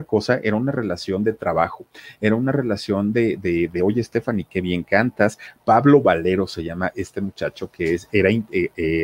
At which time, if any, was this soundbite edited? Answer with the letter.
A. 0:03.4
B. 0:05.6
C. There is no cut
C